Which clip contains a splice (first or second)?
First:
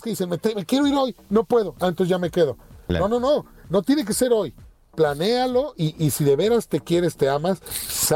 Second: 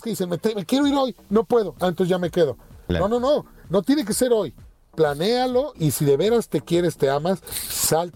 second